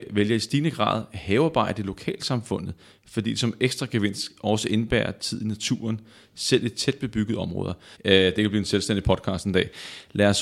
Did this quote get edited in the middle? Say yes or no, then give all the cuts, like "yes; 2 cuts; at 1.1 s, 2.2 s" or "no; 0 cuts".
yes; 1 cut; at 8.0 s